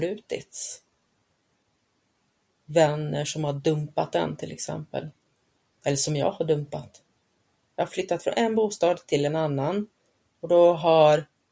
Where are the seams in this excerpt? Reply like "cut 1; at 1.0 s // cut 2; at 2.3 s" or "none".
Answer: cut 1; at 7.7 s

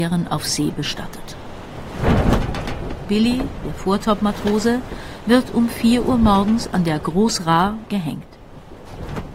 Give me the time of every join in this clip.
cut 1; at 7.9 s

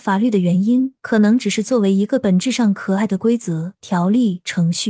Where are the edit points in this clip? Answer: none

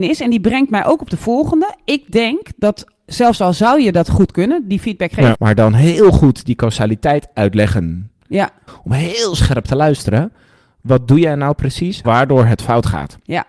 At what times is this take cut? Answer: cut 1; at 5.3 s // cut 2; at 8.7 s // cut 3; at 12.0 s

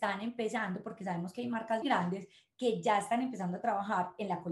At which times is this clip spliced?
cut 1; at 1.8 s

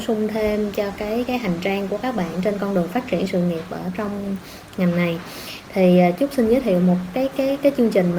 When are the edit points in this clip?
cut 1; at 1.3 s

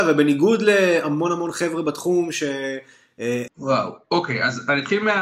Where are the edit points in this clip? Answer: cut 1; at 3.5 s

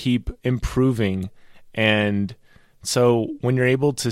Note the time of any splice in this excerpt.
none

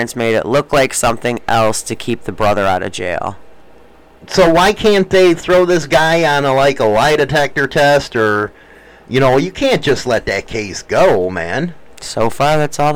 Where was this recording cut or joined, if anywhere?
none

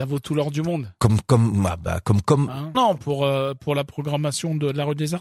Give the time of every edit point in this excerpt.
cut 1; at 2.7 s

